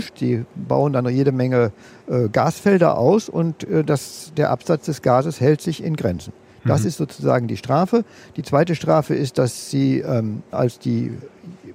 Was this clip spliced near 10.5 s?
yes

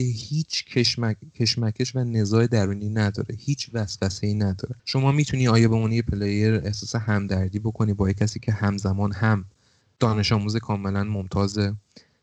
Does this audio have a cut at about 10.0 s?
no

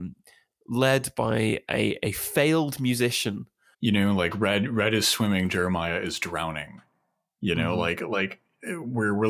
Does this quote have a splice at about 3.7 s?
yes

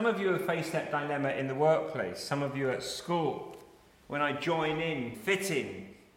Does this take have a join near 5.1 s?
yes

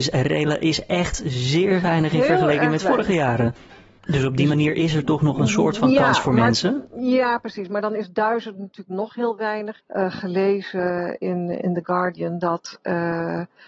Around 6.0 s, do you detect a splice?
no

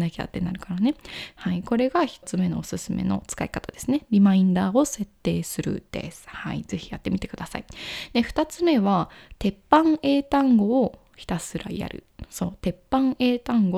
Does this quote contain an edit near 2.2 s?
yes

